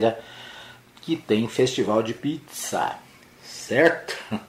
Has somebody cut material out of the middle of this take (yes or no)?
no